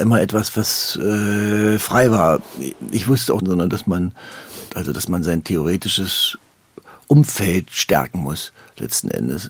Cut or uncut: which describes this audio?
cut